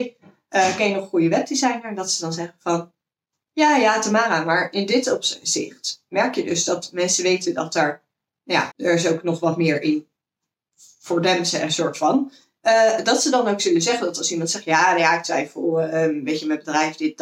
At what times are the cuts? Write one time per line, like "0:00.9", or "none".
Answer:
0:08.7

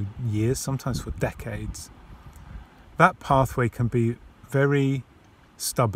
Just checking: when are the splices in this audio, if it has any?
none

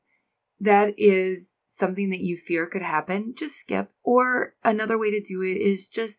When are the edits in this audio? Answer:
0:04.0

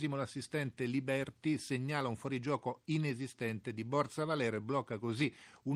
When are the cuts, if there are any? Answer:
none

